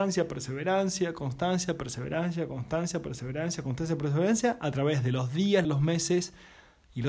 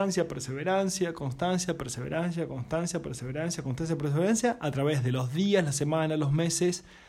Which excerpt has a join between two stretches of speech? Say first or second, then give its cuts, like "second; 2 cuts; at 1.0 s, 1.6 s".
first; 1 cut; at 5.6 s